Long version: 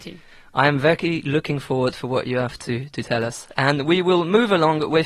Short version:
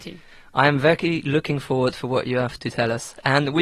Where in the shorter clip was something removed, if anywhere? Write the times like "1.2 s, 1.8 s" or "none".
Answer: 2.6 s